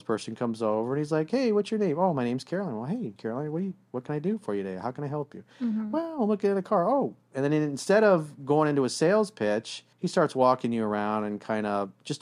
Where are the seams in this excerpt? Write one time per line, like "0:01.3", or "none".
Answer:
0:03.2
0:09.9